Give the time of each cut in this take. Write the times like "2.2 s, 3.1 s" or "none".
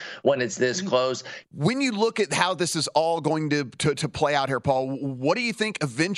1.5 s